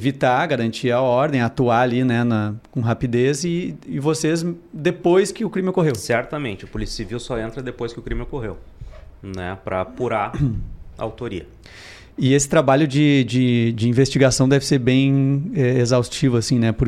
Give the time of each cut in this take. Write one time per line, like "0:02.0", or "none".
none